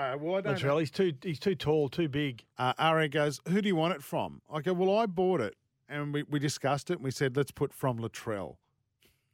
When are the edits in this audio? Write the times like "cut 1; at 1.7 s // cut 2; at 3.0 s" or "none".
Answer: cut 1; at 2.5 s